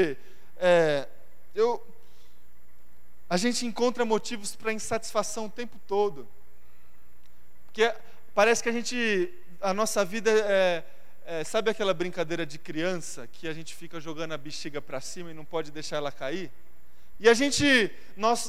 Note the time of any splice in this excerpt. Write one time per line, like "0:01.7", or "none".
0:17.1